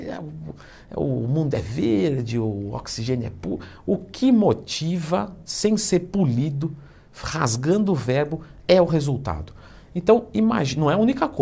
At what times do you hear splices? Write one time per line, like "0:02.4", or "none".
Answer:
none